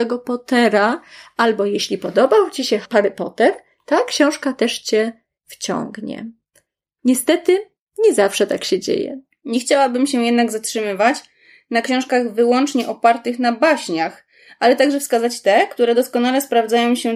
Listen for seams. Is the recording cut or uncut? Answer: cut